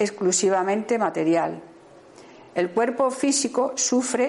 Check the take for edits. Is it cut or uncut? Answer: uncut